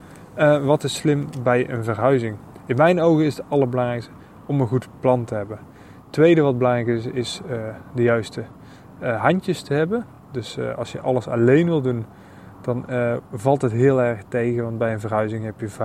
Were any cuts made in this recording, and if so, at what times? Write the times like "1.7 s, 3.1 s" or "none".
none